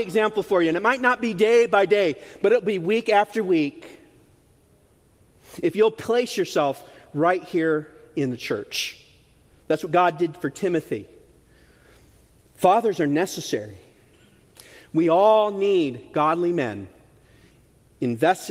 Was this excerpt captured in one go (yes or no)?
yes